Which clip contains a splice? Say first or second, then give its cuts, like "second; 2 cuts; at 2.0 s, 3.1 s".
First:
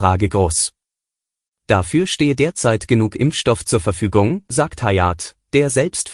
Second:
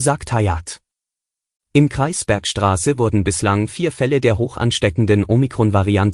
second; 1 cut; at 1.6 s